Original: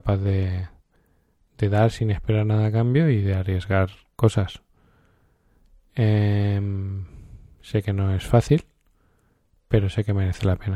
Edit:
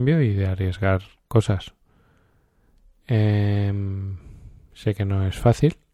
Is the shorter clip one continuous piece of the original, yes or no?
yes